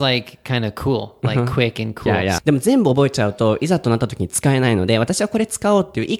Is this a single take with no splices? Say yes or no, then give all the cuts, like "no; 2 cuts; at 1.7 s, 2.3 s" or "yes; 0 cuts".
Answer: no; 1 cut; at 2.4 s